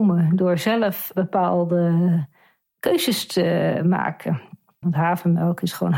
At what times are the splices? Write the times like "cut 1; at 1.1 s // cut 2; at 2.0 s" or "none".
cut 1; at 4.8 s